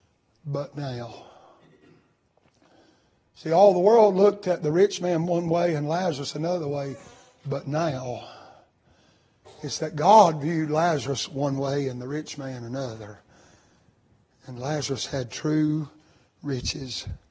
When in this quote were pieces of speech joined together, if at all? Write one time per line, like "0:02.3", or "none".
none